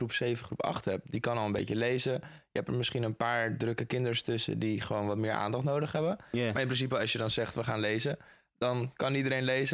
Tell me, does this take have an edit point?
no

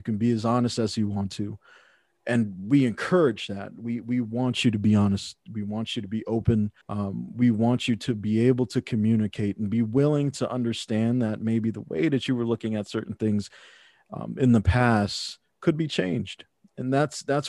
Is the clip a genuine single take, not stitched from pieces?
no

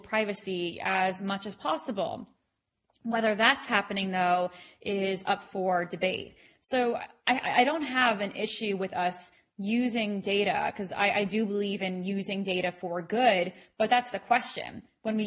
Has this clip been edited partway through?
no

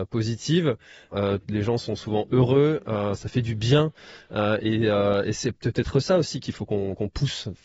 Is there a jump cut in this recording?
yes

